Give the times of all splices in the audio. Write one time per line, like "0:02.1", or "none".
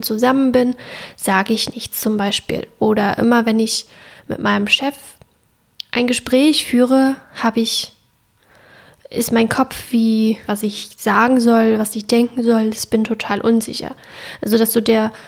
0:10.5